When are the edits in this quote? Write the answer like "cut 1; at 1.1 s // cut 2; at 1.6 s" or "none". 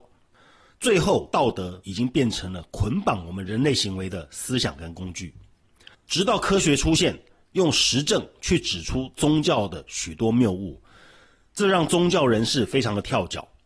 cut 1; at 5.9 s